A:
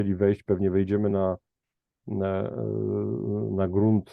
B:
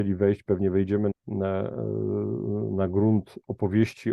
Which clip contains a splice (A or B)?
B